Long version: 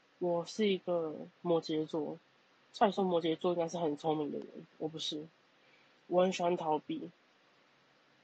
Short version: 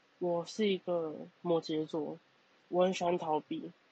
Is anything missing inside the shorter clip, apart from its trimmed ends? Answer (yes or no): yes